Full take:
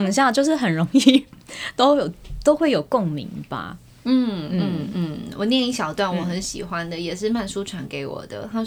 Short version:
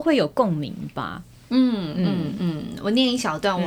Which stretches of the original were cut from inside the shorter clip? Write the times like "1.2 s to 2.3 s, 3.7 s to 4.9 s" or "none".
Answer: none